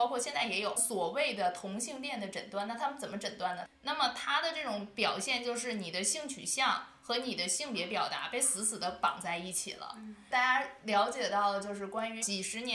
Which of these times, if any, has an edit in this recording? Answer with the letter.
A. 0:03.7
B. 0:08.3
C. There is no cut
A